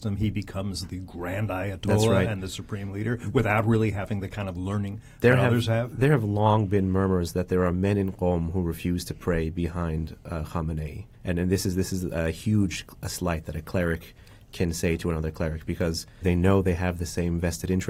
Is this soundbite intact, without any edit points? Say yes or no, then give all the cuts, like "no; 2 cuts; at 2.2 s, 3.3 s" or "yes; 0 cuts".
no; 2 cuts; at 11.1 s, 16.2 s